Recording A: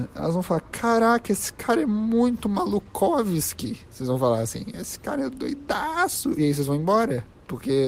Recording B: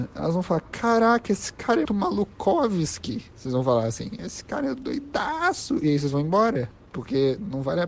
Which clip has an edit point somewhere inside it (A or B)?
B